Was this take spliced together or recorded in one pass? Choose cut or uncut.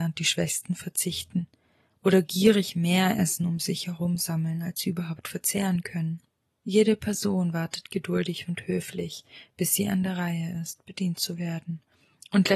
uncut